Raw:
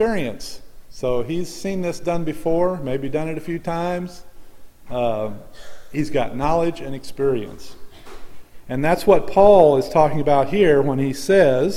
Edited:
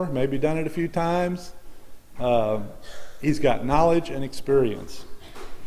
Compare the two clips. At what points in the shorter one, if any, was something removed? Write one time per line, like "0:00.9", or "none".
none